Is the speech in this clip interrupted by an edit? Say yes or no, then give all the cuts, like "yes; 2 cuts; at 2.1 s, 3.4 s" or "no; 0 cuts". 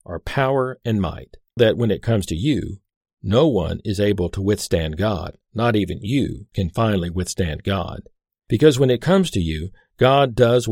yes; 2 cuts; at 1.6 s, 6.5 s